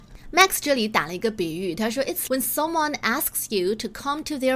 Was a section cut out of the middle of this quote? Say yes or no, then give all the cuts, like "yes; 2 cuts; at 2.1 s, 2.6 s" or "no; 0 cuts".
yes; 1 cut; at 2.3 s